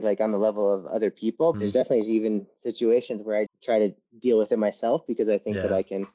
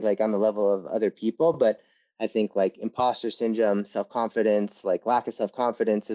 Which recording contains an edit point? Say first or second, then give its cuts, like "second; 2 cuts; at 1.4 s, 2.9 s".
first; 2 cuts; at 1.5 s, 3.5 s